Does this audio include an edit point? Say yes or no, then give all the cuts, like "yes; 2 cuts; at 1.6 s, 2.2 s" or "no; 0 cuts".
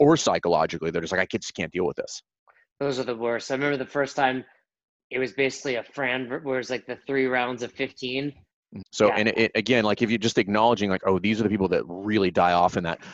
yes; 1 cut; at 8.8 s